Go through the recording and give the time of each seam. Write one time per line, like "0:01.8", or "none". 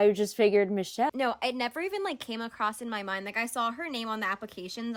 0:01.1